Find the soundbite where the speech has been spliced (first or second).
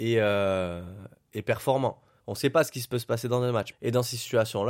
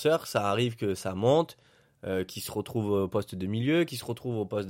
first